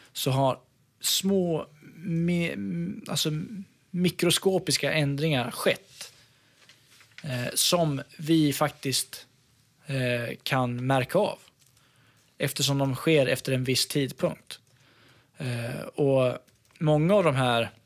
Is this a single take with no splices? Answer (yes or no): yes